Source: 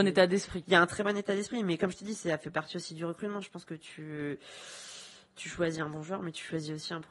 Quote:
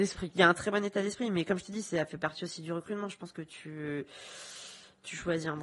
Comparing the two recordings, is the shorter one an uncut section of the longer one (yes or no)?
yes